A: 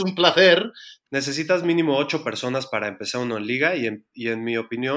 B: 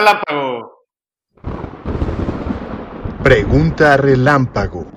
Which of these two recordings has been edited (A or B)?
A